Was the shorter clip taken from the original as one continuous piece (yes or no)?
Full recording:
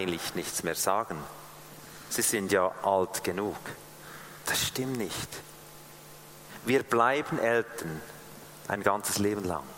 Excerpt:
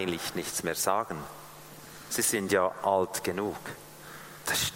yes